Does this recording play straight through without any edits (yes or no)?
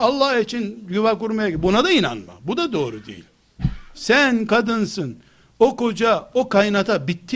no